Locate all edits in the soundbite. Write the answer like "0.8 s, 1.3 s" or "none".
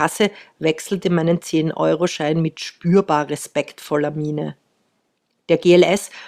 none